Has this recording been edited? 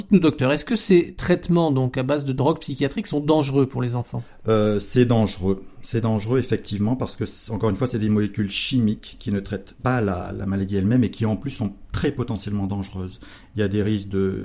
no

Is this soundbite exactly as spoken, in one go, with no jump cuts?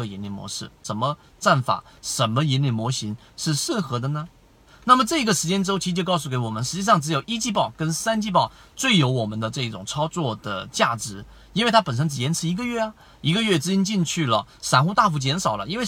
no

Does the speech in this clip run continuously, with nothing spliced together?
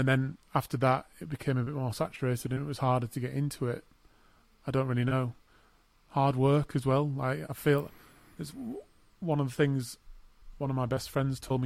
yes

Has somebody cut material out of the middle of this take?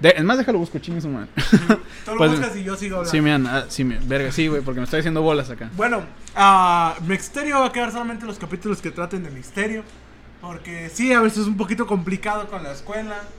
no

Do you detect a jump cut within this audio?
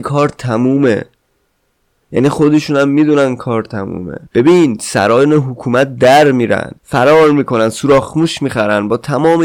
yes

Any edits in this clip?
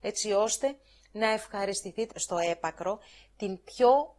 yes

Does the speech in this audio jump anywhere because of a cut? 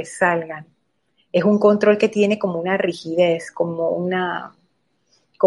no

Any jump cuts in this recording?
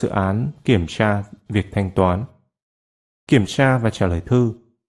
no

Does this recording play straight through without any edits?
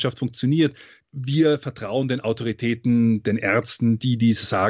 no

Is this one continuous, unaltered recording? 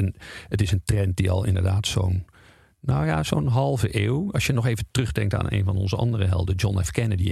yes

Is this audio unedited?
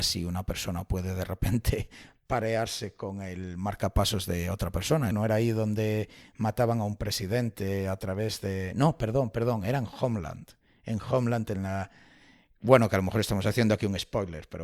no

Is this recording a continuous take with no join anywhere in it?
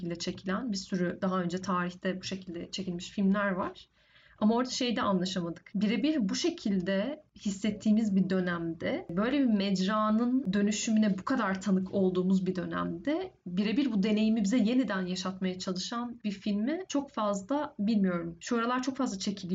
no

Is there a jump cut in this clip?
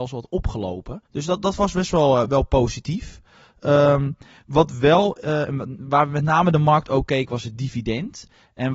yes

